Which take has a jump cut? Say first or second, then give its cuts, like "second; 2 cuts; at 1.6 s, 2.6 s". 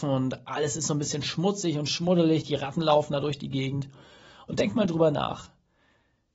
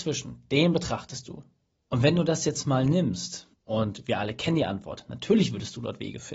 second; 2 cuts; at 1.7 s, 3.5 s